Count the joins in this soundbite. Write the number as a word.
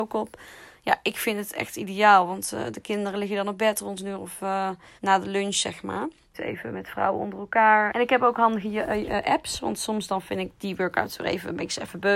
three